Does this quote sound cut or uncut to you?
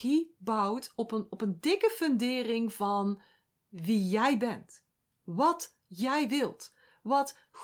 uncut